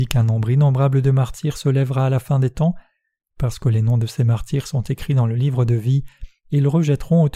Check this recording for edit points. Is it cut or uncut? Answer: uncut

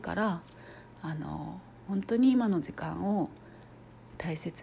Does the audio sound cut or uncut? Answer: uncut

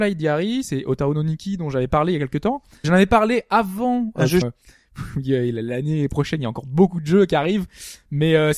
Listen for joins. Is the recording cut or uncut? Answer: cut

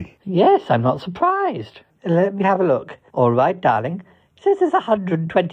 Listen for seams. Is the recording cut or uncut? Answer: cut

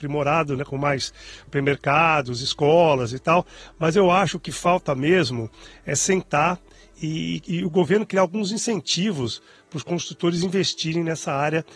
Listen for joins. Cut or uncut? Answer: cut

